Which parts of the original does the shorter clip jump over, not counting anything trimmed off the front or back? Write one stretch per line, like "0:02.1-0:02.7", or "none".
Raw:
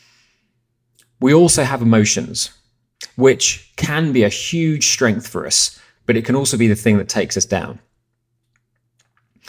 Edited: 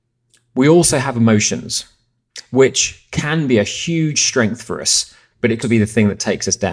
0:06.3-0:06.5